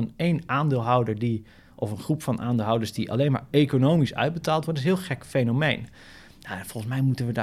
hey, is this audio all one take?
yes; 0 cuts

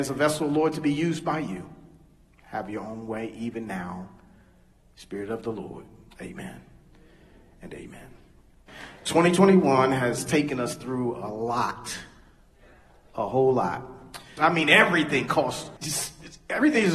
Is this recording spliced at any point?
yes; 3 cuts; at 6.1 s, 14.4 s, 15.8 s

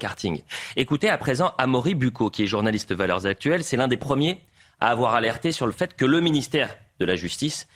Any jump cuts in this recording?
no; 0 cuts

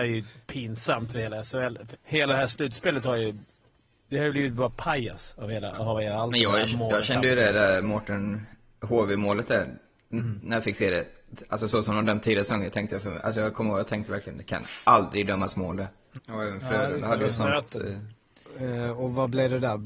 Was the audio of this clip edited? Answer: yes; 2 cuts; at 1.9 s, 16.2 s

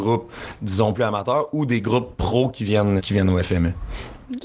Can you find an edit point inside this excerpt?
yes; 2 cuts; at 0.9 s, 3.0 s

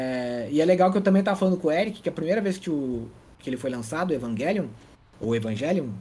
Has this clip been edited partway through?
no; 0 cuts

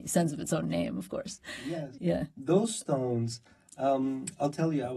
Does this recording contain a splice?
no; 0 cuts

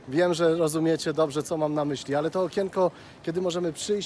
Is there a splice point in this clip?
no; 0 cuts

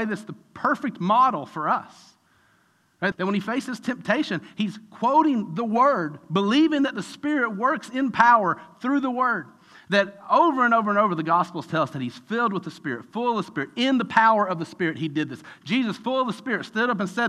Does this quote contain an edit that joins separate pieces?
yes; 1 cut; at 3.1 s

